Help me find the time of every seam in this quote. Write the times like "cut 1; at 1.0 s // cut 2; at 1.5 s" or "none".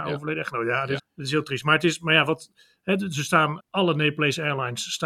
cut 1; at 1.0 s // cut 2; at 3.6 s